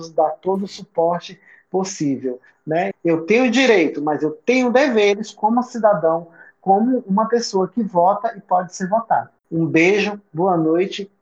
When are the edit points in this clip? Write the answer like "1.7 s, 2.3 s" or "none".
2.9 s, 9.4 s